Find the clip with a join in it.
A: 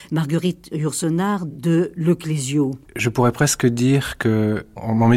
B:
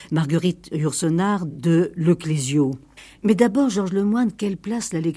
A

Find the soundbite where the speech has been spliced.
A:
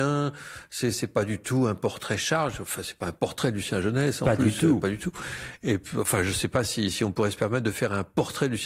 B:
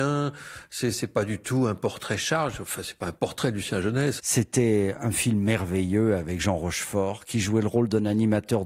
B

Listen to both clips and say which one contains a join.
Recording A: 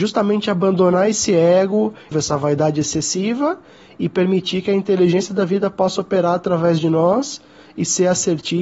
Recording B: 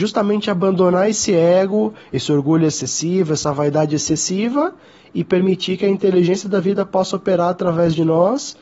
A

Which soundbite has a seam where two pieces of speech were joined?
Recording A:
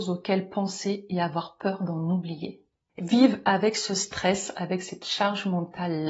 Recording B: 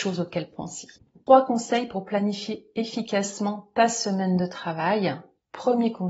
A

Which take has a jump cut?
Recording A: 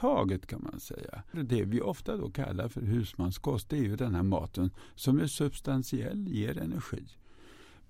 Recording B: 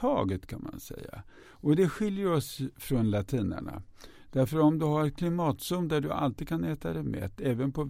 A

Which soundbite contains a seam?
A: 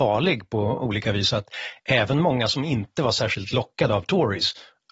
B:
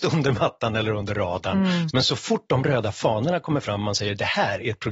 B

